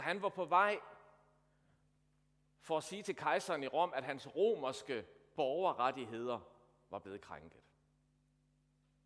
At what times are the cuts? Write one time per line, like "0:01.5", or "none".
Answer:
none